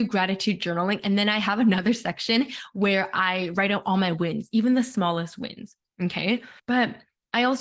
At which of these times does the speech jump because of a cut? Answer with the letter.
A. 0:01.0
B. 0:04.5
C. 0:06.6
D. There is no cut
C